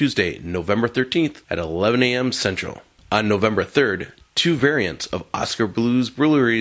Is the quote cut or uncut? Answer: uncut